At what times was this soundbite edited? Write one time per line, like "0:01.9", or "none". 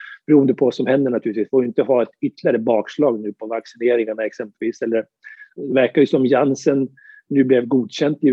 0:05.6